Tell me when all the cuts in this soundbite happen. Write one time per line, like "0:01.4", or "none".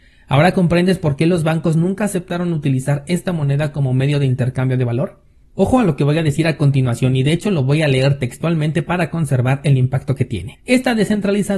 0:10.5